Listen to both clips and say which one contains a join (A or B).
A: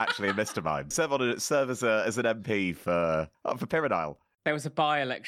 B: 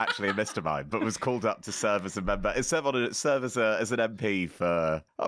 A